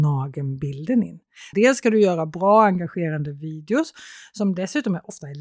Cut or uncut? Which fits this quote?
cut